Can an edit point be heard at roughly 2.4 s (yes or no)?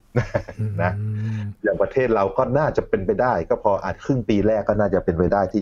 no